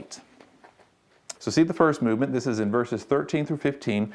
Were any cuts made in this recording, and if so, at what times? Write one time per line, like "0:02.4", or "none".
0:01.4